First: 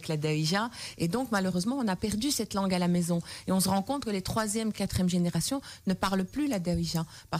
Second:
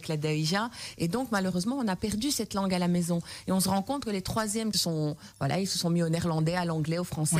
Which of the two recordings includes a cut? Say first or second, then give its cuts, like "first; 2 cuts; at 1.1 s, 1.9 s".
second; 1 cut; at 4.7 s